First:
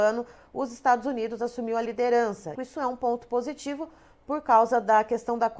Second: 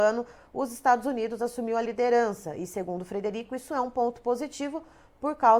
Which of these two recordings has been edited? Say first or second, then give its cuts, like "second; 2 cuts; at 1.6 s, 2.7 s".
first; 1 cut; at 2.5 s